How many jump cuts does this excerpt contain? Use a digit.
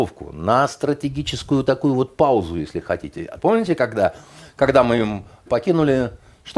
2